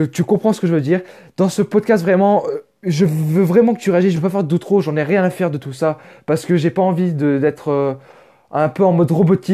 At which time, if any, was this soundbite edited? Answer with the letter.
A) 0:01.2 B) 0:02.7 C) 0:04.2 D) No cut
C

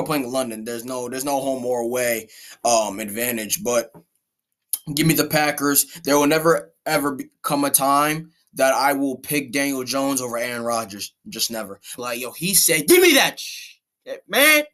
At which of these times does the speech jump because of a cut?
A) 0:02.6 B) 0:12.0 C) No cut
B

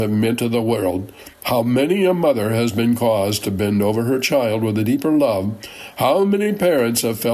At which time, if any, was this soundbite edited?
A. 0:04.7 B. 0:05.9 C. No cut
C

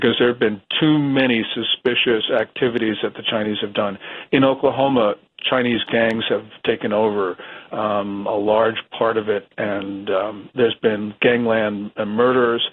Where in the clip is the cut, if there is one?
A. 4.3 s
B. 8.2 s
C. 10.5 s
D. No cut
D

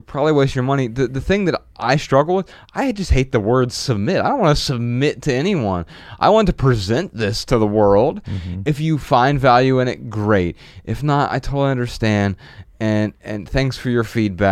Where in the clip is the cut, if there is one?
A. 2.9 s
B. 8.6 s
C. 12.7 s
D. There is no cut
D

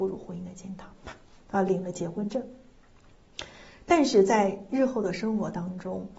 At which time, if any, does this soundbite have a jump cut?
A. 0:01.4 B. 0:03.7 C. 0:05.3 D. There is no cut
A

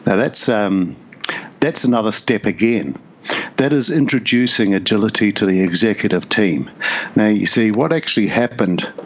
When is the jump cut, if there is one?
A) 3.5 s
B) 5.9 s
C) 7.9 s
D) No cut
D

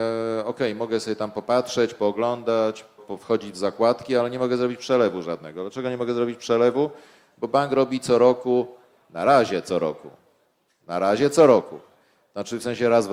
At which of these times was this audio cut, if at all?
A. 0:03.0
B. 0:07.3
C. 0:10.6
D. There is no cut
A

